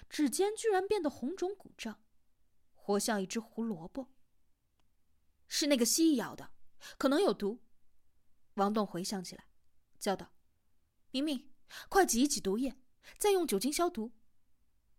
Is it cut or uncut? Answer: uncut